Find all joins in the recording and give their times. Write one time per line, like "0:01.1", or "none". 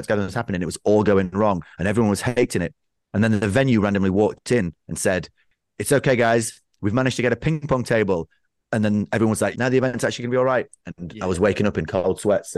0:09.5